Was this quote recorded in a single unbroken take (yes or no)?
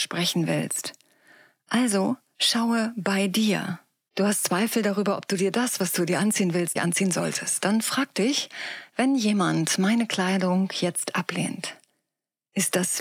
no